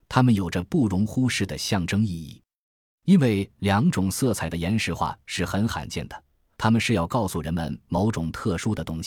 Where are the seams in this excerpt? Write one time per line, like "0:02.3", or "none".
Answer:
0:06.5